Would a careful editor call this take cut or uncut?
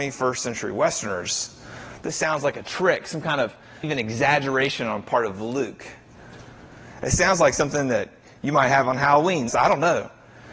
cut